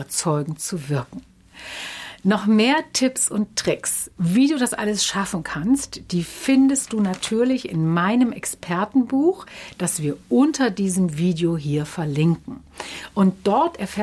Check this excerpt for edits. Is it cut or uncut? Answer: uncut